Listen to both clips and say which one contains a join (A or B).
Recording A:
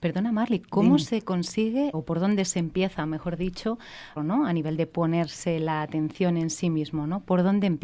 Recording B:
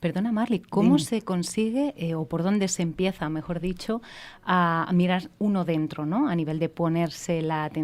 A